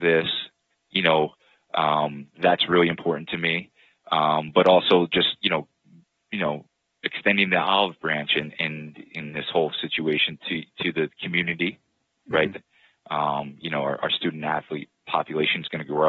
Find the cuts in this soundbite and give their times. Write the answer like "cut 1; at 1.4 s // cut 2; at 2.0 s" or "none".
cut 1; at 12.5 s // cut 2; at 15.0 s